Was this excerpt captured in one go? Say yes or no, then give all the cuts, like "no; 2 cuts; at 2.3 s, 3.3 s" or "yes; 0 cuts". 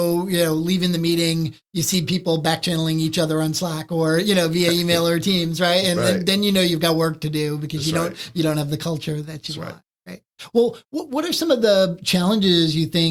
yes; 0 cuts